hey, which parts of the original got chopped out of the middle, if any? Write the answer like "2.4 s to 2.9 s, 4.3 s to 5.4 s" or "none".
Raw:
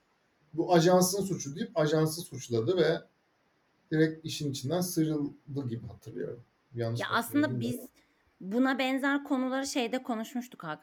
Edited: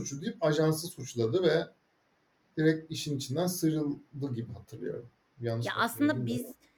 none